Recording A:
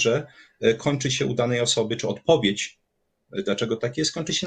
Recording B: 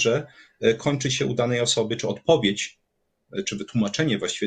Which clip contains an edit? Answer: A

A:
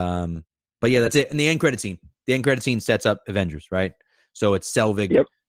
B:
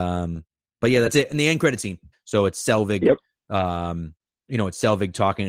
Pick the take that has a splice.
B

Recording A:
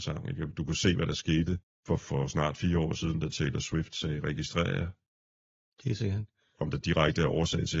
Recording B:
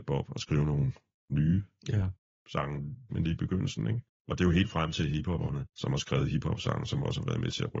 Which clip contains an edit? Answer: B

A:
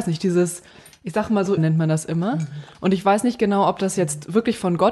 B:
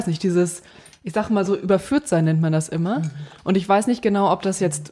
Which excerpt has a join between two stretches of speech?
A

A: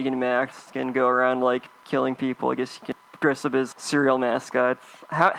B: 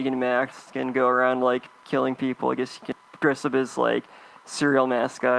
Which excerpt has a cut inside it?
A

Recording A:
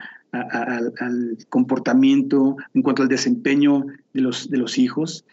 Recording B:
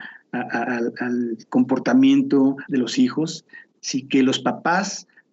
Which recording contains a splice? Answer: B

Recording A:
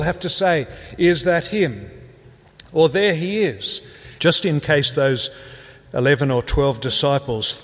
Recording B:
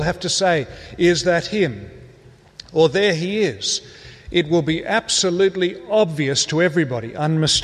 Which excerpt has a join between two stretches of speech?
A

